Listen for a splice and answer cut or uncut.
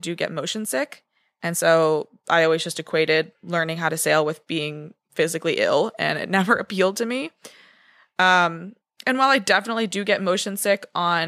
uncut